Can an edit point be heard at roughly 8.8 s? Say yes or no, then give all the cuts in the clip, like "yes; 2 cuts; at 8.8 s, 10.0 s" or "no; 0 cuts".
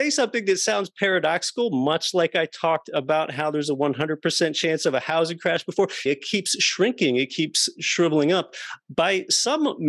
no; 1 cut; at 6.1 s